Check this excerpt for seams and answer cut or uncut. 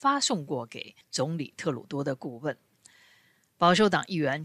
uncut